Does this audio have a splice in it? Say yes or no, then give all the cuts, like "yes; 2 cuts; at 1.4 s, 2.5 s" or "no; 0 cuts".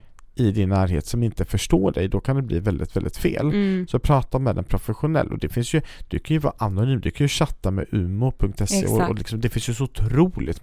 no; 0 cuts